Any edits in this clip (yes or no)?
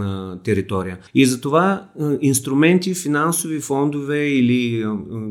yes